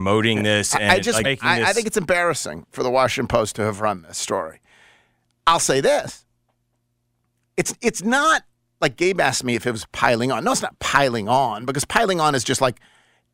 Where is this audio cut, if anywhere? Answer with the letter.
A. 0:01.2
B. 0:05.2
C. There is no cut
A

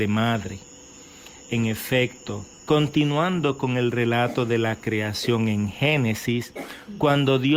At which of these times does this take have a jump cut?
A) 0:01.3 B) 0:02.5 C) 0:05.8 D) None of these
B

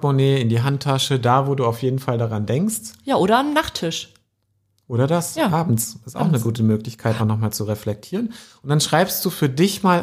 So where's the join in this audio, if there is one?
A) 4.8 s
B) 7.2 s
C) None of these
B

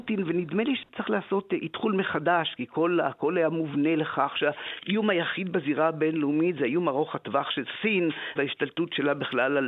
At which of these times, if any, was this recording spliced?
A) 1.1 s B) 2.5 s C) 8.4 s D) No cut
C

